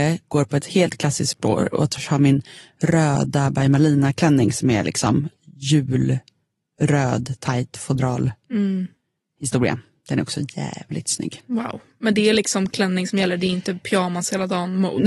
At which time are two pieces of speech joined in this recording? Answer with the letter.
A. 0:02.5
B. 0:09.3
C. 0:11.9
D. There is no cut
D